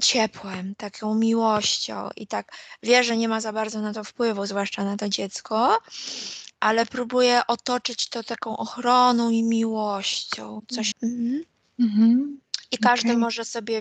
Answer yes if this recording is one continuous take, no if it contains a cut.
no